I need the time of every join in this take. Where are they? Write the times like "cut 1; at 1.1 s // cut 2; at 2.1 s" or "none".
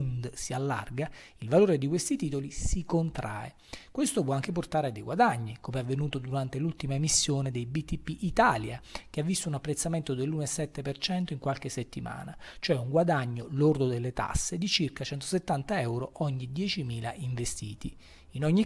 none